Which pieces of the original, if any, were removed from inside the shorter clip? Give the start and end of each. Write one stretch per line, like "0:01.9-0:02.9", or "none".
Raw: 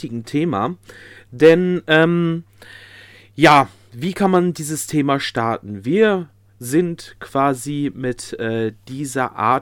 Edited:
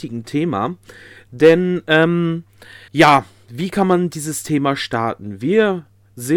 0:02.9-0:03.3